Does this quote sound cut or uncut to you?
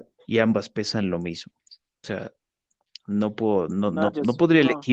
uncut